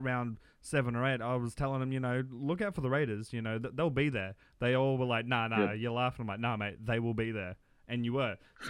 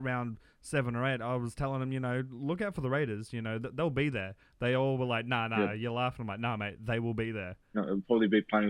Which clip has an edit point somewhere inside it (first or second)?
second